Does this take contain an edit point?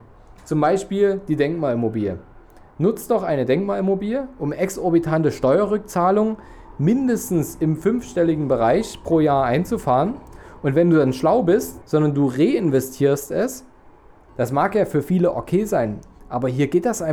yes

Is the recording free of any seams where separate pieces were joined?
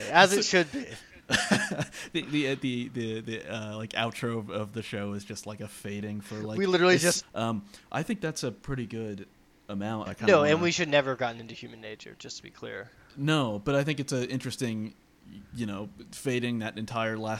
no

